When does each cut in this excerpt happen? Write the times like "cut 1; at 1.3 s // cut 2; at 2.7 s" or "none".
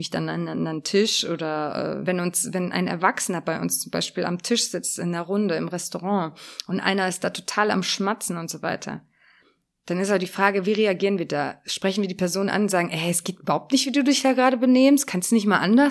cut 1; at 2.0 s